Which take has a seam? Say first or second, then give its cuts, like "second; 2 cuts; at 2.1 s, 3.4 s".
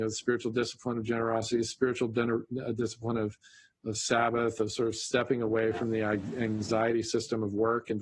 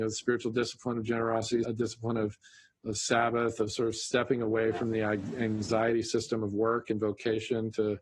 second; 1 cut; at 1.6 s